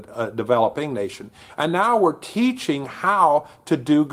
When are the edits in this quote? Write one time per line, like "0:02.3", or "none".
0:01.5